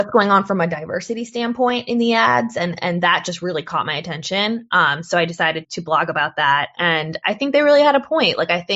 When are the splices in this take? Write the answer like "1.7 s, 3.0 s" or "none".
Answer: 5.6 s

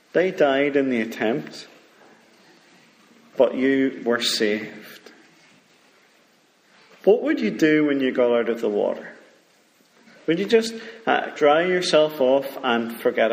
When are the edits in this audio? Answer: 11.4 s

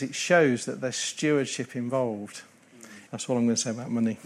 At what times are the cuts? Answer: 3.1 s

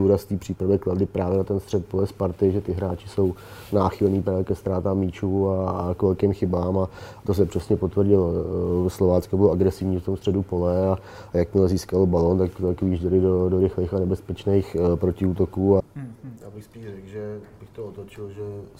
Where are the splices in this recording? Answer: 15.8 s

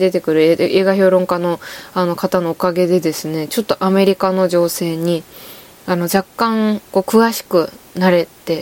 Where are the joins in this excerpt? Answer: none

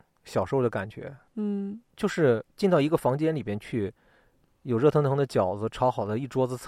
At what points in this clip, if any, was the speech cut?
none

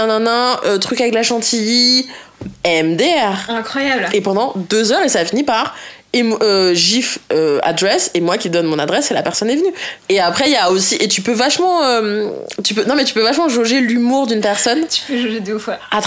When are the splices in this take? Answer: 4.1 s, 10.0 s

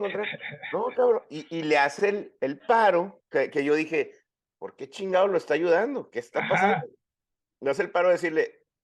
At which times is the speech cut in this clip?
none

